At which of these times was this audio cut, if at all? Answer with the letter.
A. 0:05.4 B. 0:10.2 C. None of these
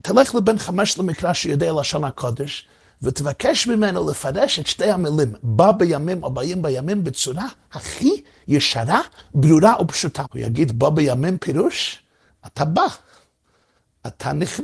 B